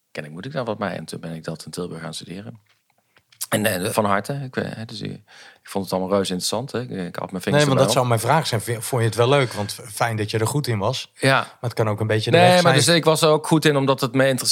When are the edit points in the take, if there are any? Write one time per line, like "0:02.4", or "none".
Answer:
0:01.0
0:03.9